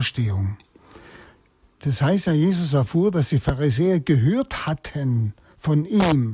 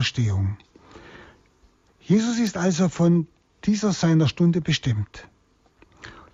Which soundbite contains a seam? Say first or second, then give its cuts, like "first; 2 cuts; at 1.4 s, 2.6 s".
first; 1 cut; at 1.8 s